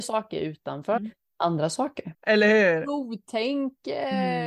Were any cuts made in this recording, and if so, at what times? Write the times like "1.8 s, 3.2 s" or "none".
1.0 s, 2.1 s

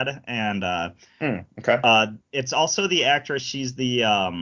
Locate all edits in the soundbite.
none

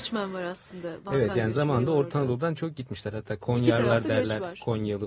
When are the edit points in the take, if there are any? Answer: none

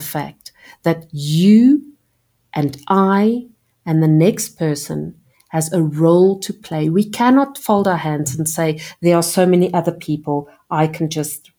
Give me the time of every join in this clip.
none

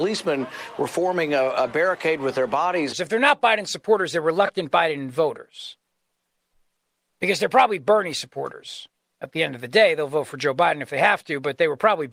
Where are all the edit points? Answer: 2.9 s

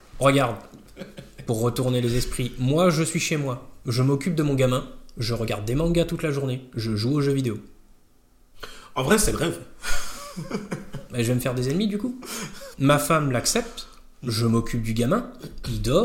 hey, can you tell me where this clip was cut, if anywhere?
none

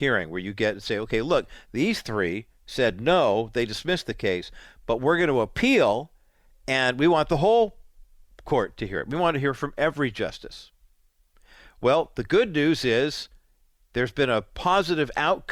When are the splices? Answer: none

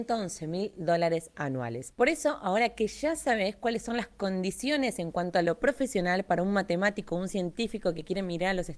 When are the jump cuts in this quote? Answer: 1.9 s

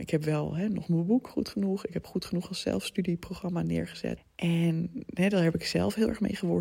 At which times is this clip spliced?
4.2 s

